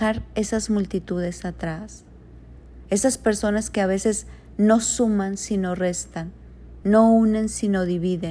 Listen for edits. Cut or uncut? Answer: uncut